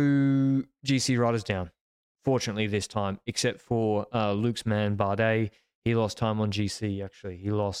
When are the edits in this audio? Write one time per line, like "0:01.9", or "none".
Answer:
none